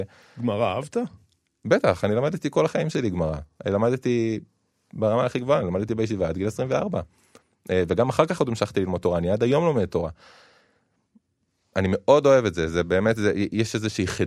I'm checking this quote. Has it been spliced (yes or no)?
no